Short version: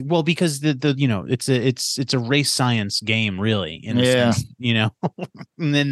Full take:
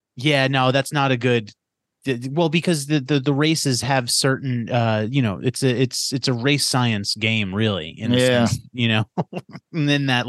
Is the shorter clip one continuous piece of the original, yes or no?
no